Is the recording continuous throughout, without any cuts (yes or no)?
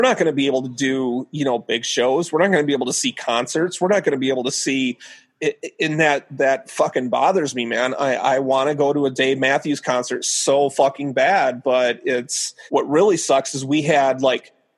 no